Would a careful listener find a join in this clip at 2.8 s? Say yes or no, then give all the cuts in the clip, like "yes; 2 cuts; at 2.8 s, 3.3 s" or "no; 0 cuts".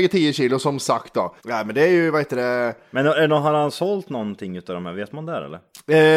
no; 1 cut; at 1.4 s